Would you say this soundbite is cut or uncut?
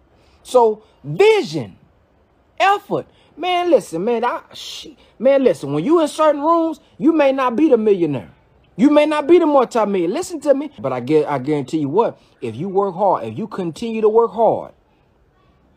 cut